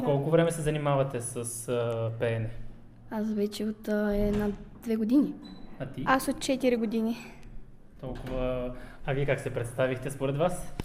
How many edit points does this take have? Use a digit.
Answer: 1